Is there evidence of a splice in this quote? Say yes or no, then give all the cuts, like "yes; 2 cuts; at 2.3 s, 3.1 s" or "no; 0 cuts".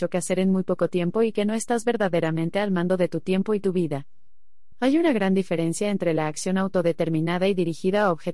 yes; 1 cut; at 4.7 s